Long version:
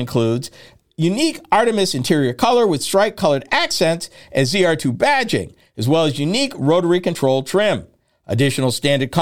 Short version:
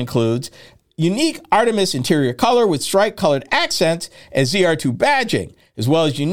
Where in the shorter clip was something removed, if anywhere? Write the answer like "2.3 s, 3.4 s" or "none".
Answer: none

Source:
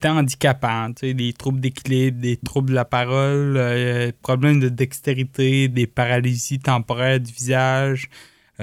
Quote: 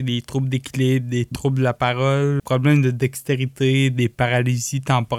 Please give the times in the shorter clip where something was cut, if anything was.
2.4 s

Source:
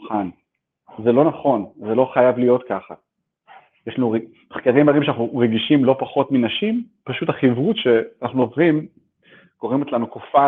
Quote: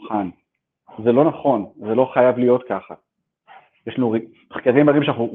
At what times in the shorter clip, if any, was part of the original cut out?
none

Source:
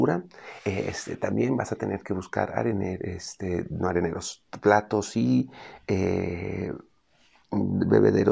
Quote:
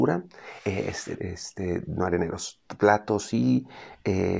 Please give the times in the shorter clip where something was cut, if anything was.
1.2 s

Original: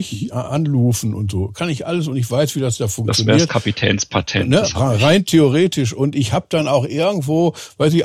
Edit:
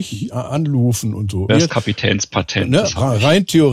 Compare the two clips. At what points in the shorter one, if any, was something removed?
1.5 s

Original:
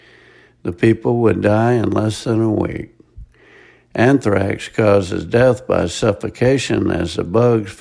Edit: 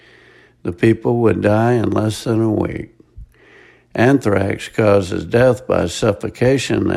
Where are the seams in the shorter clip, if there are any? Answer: none

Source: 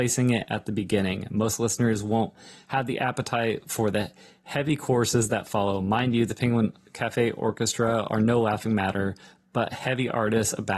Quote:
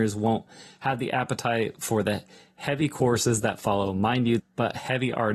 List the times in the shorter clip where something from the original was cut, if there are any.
4.4 s

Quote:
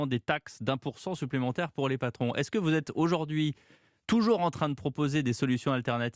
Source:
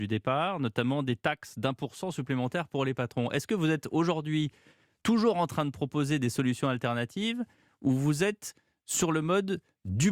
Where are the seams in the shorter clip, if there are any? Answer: none

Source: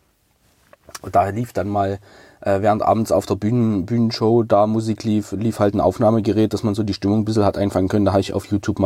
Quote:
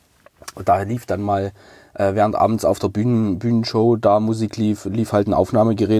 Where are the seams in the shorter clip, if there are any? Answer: none

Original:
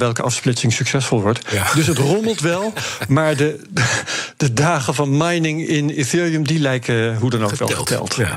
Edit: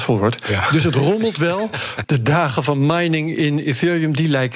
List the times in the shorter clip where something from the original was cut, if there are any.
2.0 s

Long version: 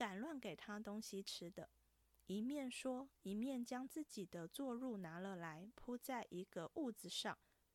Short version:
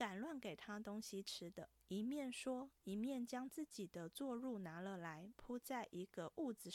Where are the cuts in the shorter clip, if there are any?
1.8 s

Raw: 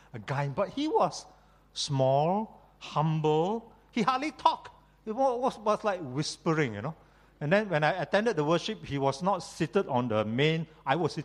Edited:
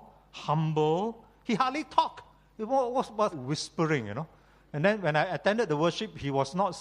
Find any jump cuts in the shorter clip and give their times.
3.3 s

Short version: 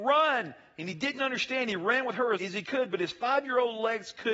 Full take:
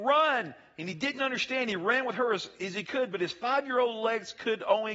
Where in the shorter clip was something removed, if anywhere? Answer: 2.3 s

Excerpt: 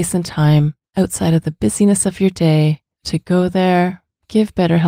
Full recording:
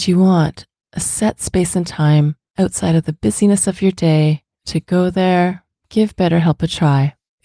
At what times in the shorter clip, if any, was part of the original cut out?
none

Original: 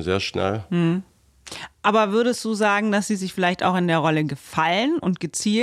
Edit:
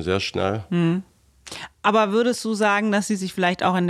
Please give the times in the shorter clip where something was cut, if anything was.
none

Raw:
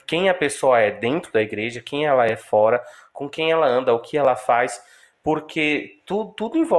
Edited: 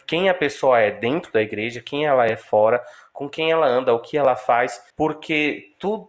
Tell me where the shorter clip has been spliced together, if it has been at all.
4.9 s

